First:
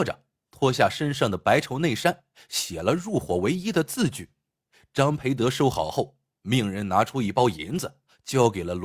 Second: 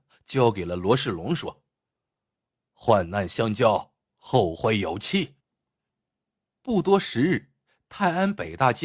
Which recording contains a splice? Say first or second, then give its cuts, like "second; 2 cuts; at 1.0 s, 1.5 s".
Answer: second; 1 cut; at 5.4 s